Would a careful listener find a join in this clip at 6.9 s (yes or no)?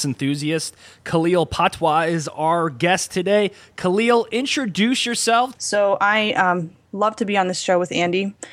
yes